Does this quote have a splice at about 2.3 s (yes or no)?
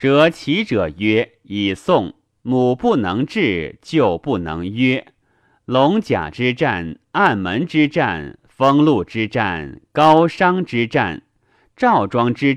yes